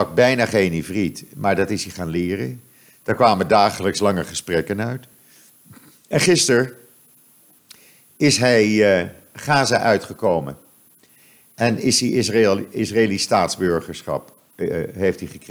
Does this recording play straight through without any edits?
yes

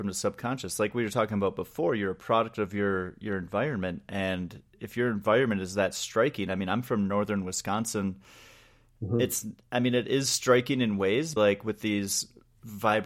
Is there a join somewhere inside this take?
yes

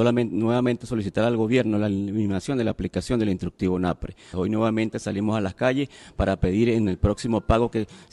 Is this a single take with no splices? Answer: no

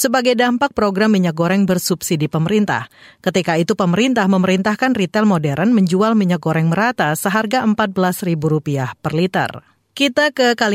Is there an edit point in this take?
no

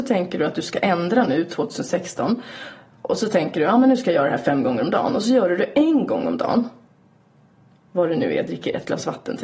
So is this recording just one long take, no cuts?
yes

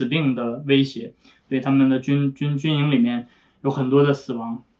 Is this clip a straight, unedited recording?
yes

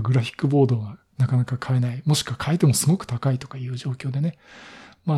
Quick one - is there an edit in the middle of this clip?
no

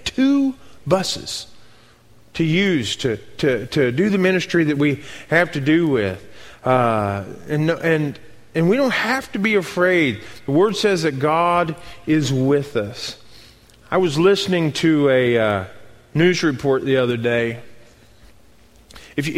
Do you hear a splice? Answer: no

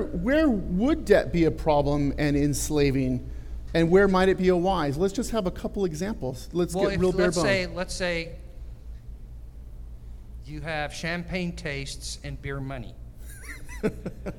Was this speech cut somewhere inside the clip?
yes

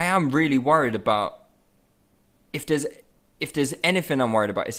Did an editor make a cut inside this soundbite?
no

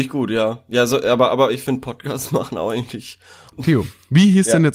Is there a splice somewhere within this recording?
yes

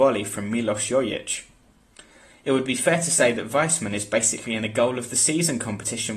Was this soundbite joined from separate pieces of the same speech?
no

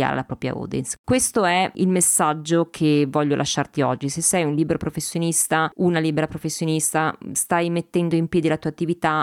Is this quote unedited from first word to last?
yes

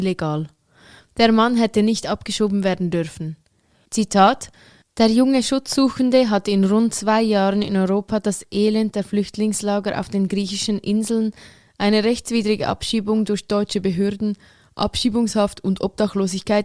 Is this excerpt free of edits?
no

